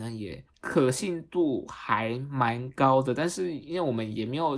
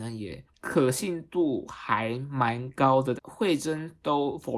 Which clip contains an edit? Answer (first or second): second